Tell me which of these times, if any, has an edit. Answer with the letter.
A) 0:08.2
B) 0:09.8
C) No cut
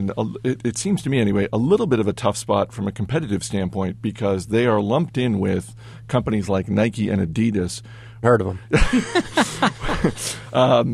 A